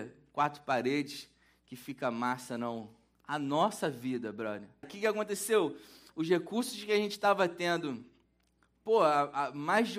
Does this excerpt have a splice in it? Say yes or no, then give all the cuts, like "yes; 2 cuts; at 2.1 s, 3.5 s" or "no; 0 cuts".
yes; 1 cut; at 4.8 s